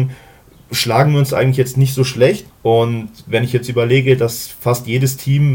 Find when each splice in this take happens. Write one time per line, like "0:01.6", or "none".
0:02.5